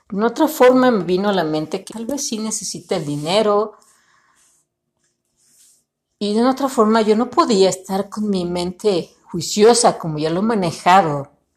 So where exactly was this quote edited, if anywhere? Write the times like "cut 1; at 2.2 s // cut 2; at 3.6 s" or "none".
cut 1; at 1.9 s